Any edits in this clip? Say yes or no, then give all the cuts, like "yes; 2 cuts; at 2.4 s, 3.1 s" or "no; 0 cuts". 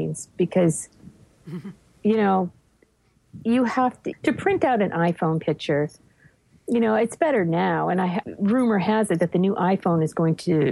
yes; 2 cuts; at 4.1 s, 8.2 s